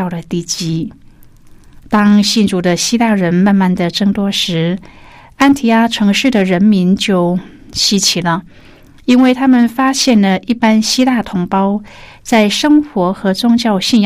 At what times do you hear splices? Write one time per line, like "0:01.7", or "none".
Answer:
none